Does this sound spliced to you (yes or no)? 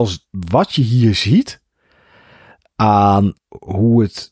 yes